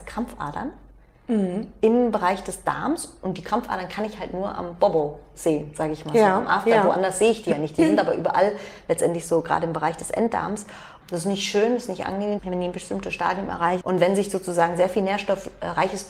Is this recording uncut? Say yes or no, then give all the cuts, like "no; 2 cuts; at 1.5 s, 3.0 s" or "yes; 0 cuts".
no; 3 cuts; at 11.0 s, 12.4 s, 13.8 s